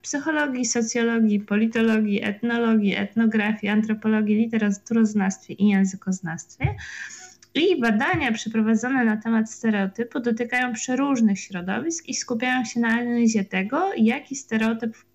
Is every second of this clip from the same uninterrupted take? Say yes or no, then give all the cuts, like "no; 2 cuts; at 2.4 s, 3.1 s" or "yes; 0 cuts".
yes; 0 cuts